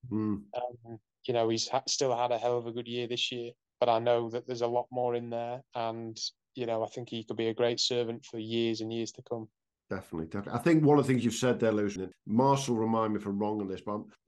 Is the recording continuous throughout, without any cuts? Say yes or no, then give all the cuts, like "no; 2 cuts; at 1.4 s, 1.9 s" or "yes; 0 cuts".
no; 1 cut; at 12.0 s